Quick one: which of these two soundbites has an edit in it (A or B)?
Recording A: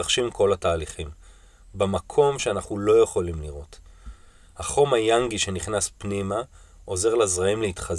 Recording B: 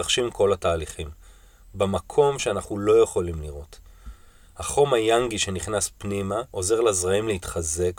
B